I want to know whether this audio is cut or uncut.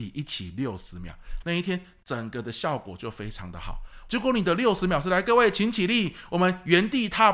cut